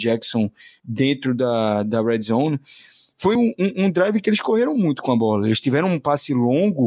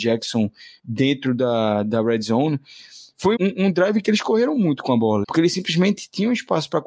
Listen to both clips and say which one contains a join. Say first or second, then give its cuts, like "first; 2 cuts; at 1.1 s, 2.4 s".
second; 2 cuts; at 3.4 s, 5.2 s